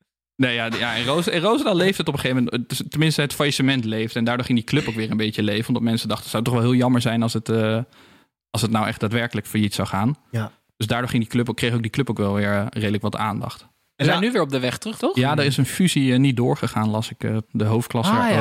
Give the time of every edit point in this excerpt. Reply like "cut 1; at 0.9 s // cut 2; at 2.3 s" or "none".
cut 1; at 15.0 s // cut 2; at 17.4 s